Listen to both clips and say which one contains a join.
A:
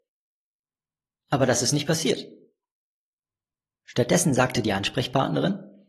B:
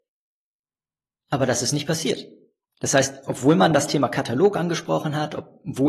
B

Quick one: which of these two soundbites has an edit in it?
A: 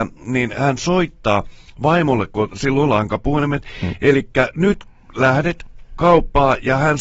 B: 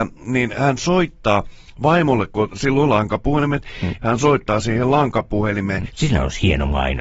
B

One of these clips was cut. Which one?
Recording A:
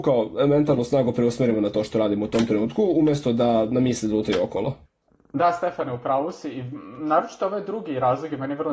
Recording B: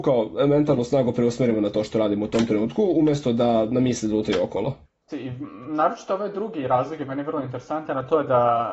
B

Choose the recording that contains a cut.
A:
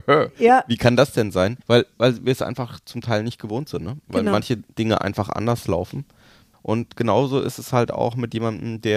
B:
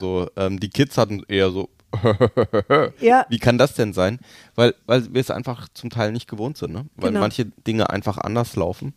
A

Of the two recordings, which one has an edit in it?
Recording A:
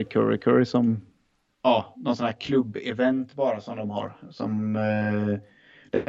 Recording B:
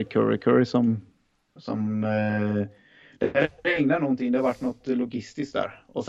B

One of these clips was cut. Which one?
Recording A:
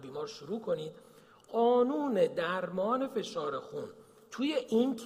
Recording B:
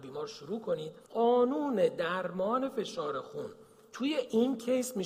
B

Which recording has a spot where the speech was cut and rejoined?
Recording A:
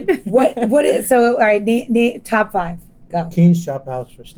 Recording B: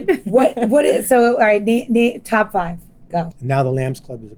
B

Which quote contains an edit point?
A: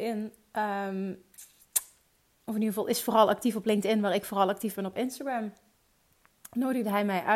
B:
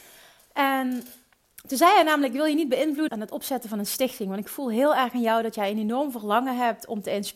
B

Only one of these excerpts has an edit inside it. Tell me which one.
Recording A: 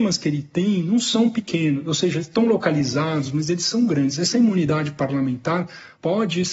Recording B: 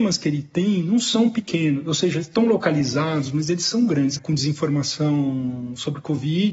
B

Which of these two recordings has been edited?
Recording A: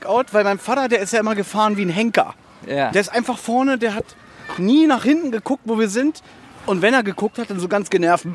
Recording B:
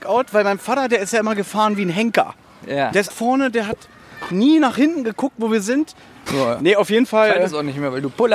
B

